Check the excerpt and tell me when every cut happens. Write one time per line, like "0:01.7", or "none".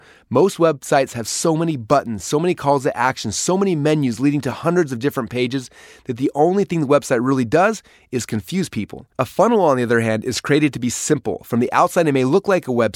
0:09.1